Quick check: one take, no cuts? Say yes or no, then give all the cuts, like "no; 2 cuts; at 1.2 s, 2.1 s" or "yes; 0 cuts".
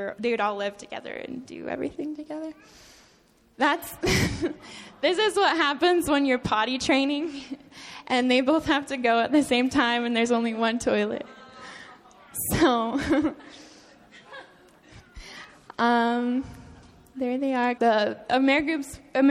no; 1 cut; at 17.8 s